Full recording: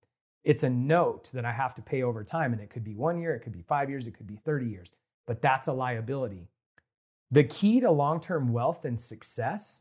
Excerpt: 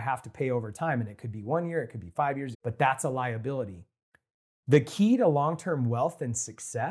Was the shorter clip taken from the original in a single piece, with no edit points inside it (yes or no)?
no